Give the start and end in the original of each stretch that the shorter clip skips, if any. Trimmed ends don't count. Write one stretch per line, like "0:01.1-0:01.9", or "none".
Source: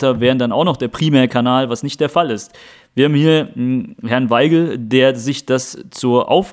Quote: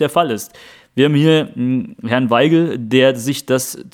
none